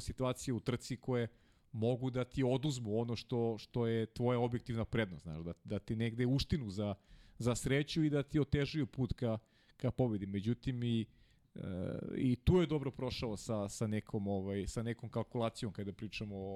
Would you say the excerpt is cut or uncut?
uncut